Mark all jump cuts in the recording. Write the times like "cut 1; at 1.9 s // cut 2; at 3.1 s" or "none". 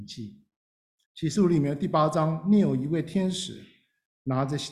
cut 1; at 1.0 s